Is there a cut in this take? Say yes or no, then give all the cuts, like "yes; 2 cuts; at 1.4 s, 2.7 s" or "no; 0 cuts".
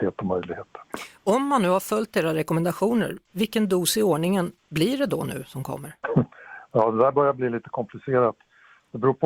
no; 0 cuts